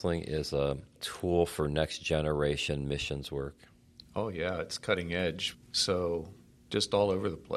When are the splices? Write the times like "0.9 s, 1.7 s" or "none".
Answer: 5.6 s